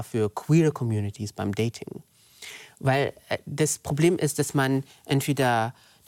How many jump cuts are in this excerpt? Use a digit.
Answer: 0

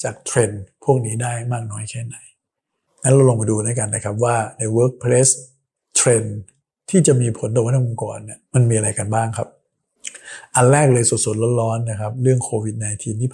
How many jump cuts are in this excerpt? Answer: 1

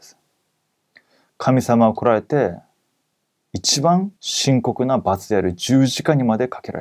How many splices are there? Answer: 1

